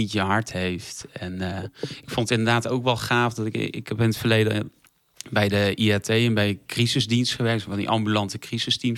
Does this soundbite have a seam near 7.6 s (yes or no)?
no